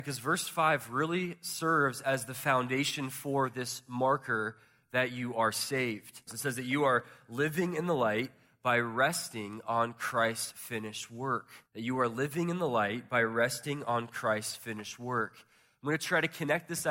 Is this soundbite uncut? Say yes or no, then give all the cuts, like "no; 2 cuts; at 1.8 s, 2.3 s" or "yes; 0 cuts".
no; 2 cuts; at 6.3 s, 11.7 s